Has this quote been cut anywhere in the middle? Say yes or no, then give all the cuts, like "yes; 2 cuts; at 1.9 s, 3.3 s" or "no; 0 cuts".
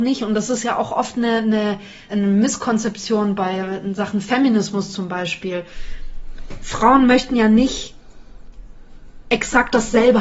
yes; 1 cut; at 2.1 s